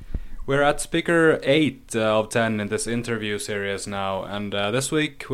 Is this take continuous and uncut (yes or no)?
yes